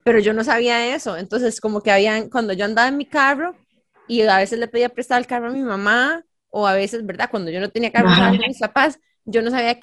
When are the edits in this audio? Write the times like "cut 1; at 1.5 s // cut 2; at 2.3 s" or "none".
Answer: none